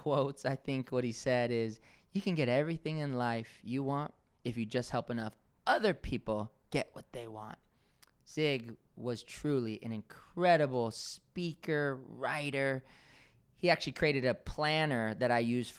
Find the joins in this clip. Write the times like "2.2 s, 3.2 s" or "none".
none